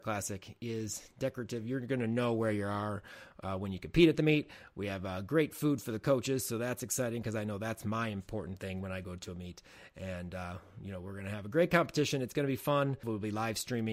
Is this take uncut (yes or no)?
no